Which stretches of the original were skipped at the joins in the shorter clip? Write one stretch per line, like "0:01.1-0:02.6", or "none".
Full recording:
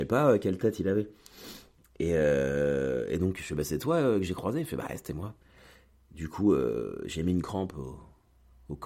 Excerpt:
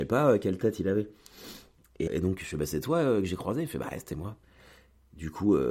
0:02.1-0:03.1